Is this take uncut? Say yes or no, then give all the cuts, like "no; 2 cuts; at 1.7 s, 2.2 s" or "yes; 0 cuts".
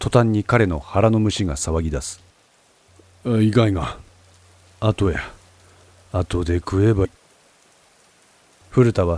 no; 1 cut; at 7.0 s